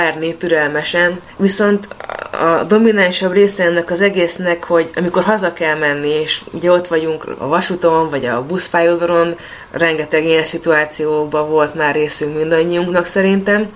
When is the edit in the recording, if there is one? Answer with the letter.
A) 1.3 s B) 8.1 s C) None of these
A